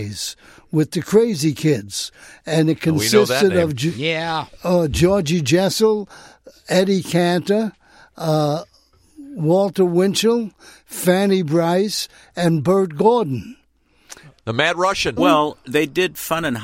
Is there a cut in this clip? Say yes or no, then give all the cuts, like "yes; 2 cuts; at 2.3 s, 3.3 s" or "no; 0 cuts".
yes; 1 cut; at 15.2 s